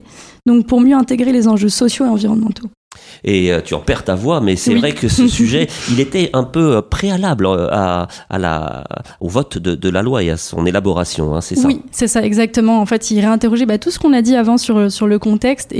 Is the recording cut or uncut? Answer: uncut